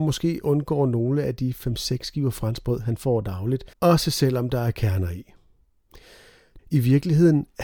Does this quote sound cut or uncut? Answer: cut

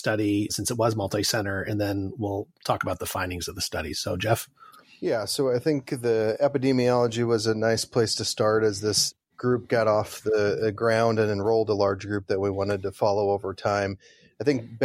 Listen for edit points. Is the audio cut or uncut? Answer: uncut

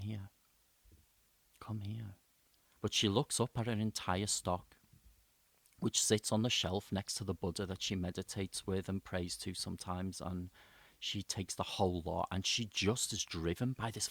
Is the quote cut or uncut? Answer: cut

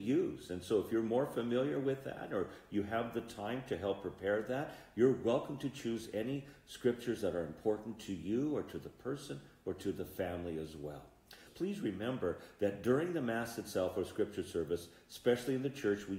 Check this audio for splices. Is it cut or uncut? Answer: cut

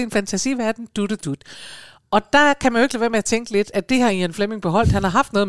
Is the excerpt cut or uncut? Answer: uncut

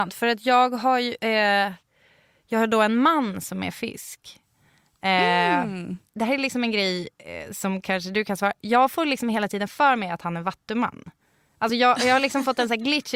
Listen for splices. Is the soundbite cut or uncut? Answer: uncut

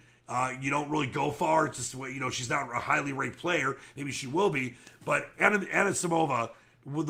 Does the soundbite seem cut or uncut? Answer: uncut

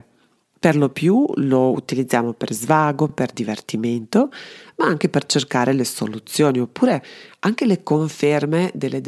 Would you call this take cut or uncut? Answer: uncut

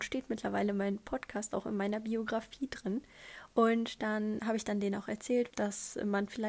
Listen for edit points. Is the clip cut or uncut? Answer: cut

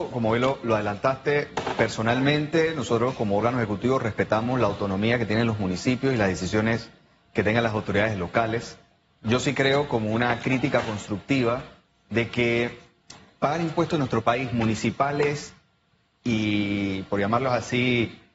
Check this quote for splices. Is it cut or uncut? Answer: uncut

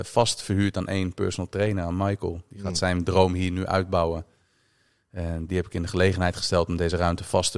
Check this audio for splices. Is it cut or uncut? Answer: cut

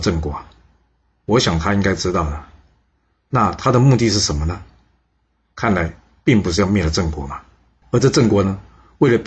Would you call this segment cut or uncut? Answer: cut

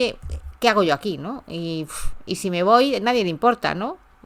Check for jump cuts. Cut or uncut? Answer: uncut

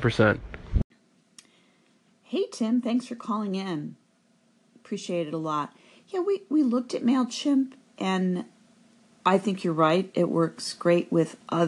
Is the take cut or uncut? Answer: uncut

